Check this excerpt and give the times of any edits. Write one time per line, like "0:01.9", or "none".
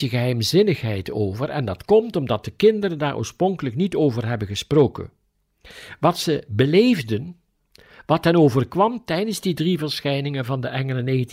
none